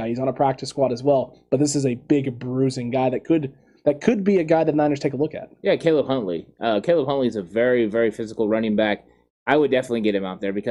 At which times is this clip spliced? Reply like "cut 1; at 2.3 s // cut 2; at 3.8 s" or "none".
cut 1; at 9.3 s